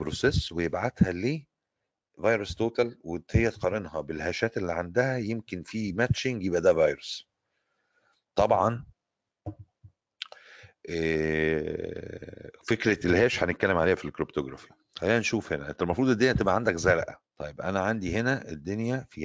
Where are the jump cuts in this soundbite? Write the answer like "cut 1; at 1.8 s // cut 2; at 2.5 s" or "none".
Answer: cut 1; at 17.3 s